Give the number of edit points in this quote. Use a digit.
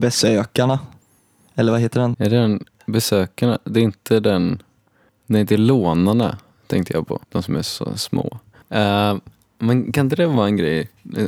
3